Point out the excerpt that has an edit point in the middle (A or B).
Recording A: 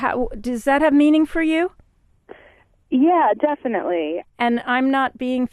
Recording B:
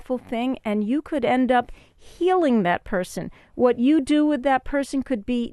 A